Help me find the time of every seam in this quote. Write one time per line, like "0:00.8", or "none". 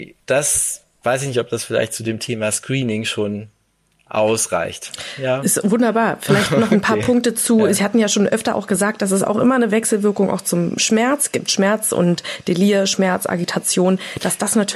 none

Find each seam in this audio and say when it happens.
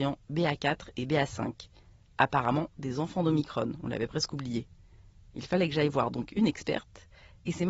none

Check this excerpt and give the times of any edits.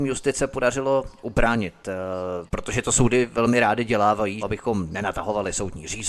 0:04.4

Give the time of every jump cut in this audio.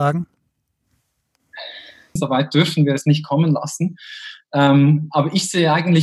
0:02.2

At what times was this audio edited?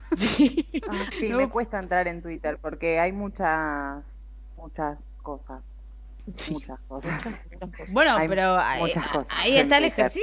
0:01.1

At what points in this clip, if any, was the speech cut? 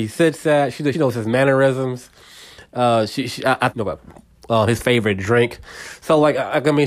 0:00.9
0:03.7

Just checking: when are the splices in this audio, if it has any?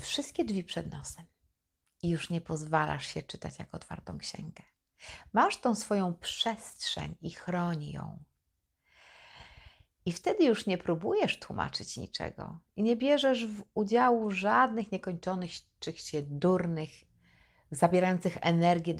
0:10.0

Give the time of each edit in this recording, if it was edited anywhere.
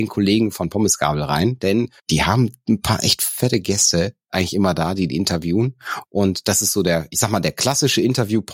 0:02.0

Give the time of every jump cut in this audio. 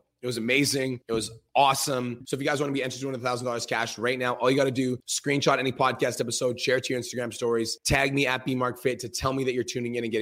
0:02.2

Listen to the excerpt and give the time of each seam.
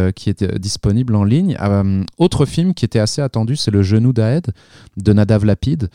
none

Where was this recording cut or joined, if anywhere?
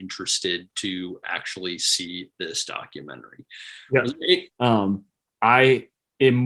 0:04.5

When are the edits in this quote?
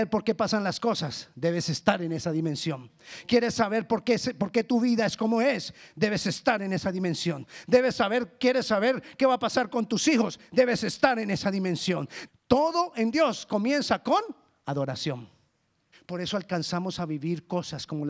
0:12.3
0:15.9

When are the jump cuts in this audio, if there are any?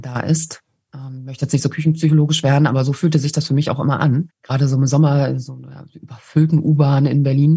0:04.3

